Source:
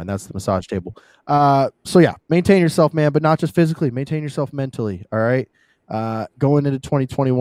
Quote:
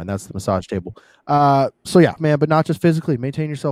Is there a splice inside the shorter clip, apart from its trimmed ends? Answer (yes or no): yes